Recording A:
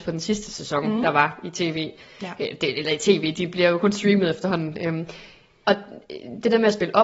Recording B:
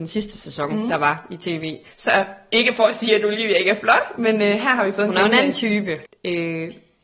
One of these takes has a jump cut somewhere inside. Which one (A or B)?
B